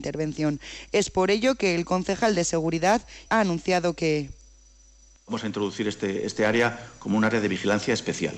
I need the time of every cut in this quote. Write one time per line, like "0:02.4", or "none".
0:03.3